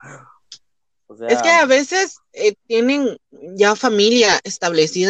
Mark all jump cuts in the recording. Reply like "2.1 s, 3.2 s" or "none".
none